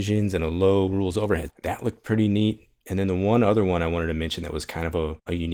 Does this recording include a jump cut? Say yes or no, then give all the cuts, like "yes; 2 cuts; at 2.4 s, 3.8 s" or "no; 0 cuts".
yes; 1 cut; at 1.5 s